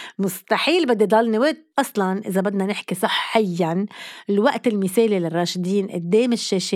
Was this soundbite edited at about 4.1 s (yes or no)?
no